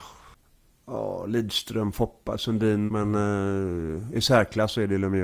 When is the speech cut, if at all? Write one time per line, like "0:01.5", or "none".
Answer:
0:02.9